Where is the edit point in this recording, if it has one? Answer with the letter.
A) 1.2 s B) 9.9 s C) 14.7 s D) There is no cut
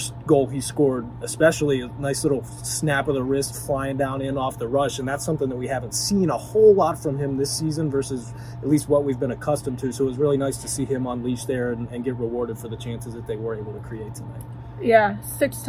D